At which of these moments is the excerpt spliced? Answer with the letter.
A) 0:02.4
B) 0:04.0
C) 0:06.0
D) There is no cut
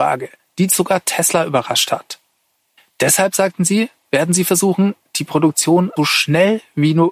C